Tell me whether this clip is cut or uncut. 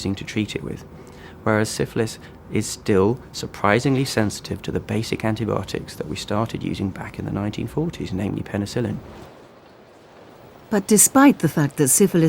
uncut